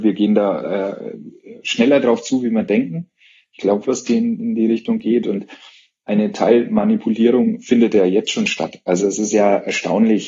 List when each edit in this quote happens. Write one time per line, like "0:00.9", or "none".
0:03.8

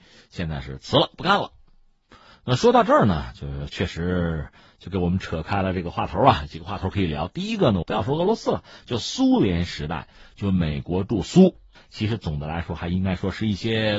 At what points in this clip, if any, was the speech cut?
0:07.8
0:11.8

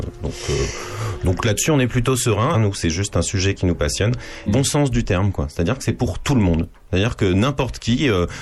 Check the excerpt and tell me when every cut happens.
0:02.5
0:04.5

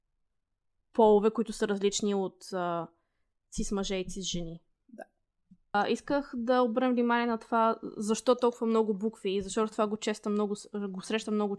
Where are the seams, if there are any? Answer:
none

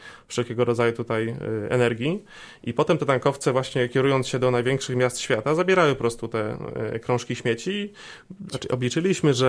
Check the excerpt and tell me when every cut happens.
0:08.5

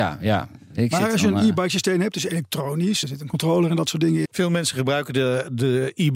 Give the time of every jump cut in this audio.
0:03.0
0:04.2

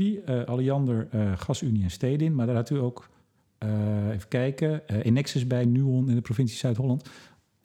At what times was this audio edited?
none

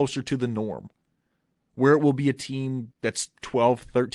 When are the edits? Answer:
0:02.9

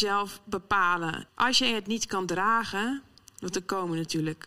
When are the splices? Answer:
0:01.3

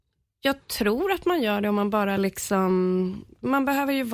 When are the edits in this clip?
none

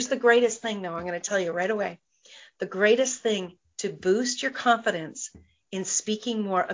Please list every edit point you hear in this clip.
none

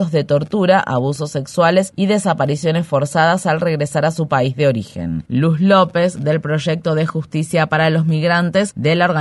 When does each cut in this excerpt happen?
0:05.3

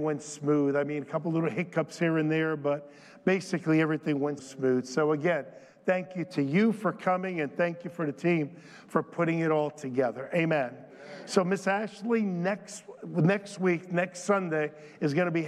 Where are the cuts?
0:04.4

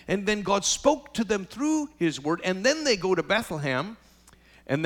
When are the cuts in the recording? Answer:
none

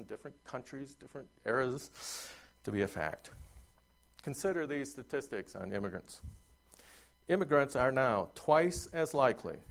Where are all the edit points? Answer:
none

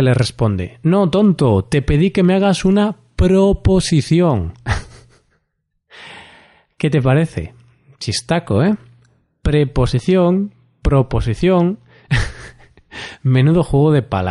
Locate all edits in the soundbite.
none

